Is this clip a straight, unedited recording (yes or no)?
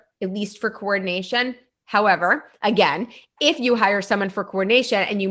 yes